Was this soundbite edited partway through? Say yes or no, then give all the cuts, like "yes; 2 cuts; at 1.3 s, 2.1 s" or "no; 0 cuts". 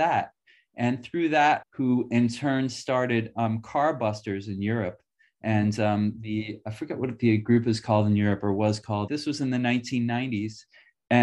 yes; 2 cuts; at 1.6 s, 9.1 s